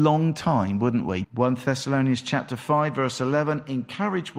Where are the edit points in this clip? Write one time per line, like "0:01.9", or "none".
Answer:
0:01.2